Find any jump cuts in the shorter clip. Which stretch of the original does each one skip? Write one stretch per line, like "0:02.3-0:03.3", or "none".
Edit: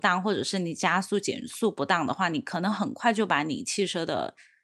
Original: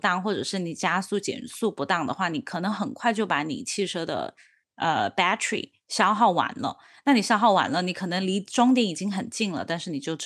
none

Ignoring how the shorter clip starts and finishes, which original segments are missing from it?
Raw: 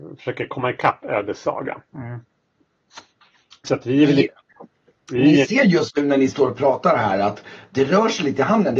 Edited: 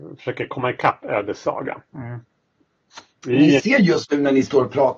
0:03.2-0:05.0

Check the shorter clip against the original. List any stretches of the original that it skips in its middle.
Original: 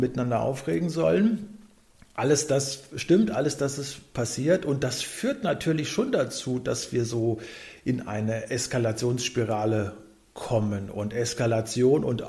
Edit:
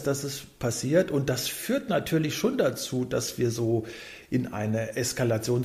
none

